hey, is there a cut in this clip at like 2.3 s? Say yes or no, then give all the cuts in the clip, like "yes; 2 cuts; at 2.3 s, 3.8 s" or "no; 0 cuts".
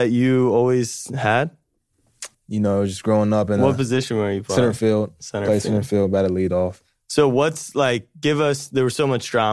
yes; 1 cut; at 2.3 s